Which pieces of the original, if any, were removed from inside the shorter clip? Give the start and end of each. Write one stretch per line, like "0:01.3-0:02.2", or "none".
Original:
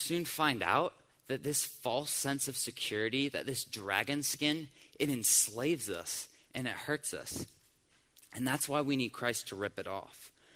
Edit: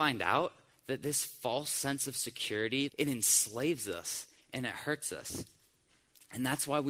0:03.3-0:04.9

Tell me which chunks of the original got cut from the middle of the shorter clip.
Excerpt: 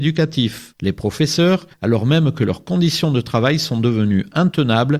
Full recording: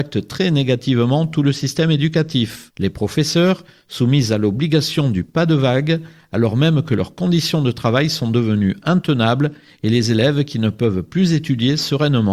0:03.7-0:06.2

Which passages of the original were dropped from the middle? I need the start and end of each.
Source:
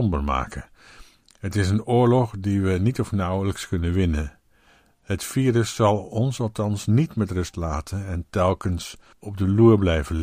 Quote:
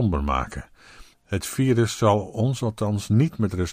0:01.1-0:04.9

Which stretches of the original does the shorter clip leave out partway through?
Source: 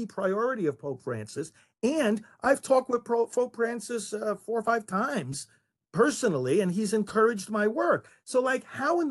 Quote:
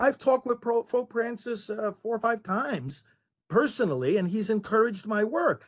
none

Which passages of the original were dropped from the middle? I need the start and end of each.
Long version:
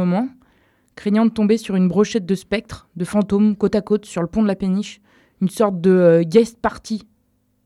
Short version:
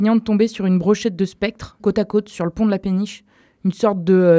0:02.9-0:03.6

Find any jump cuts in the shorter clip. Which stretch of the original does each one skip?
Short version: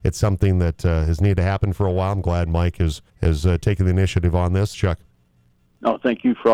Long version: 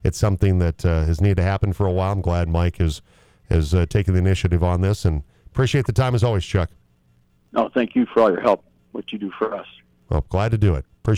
0:03.1-0:03.4
0:05.0-0:06.4

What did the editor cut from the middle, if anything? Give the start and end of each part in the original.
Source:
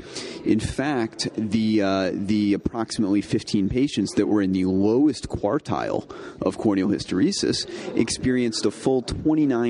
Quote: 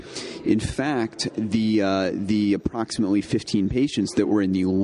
none

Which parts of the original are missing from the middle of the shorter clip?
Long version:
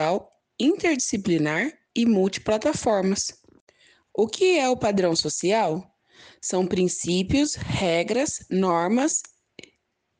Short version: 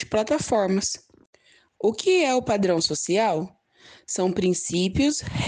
none

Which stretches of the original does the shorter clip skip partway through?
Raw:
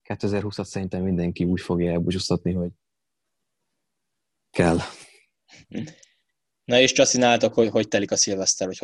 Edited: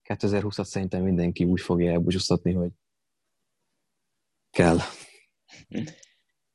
none

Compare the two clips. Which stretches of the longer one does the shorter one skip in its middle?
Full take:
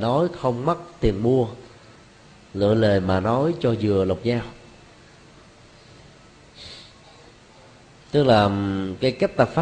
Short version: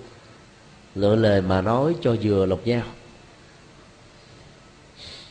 none

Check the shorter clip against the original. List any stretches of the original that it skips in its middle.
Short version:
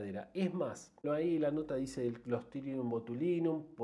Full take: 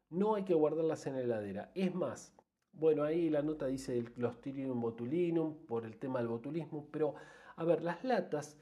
0:02.4-0:02.9

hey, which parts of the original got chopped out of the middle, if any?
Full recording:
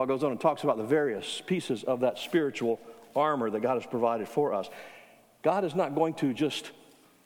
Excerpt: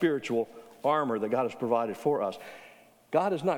none

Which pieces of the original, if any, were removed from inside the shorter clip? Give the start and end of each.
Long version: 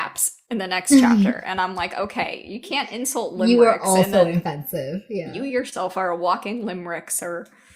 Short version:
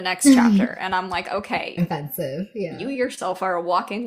0:02.4-0:04.3

